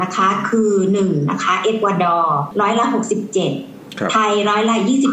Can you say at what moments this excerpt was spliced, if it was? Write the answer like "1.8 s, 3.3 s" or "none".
none

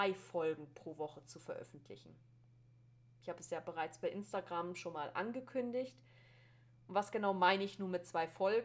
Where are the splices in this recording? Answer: none

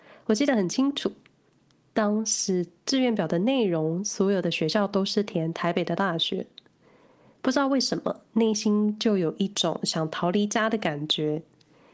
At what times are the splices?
none

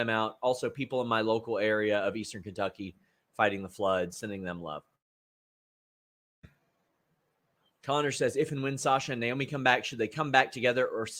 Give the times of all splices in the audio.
none

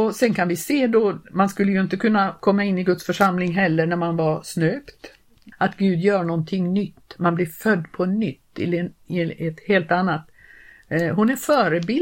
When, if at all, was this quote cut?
5.5 s

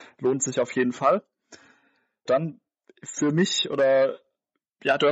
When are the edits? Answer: 2.3 s

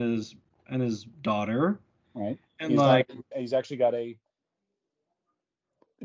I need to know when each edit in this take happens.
3.3 s

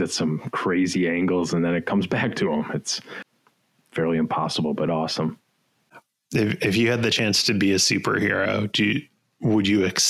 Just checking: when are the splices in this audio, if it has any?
6.2 s

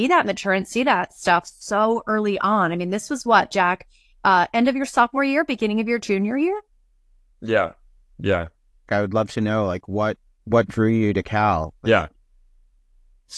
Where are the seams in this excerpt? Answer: 8.9 s, 11.8 s

